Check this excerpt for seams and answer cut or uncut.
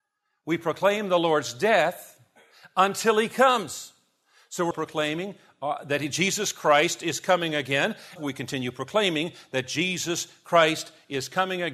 cut